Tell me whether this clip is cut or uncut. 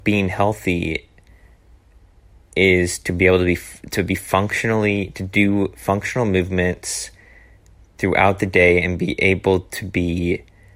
uncut